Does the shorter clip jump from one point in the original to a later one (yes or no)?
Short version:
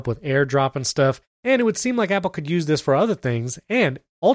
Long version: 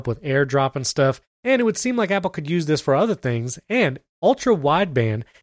no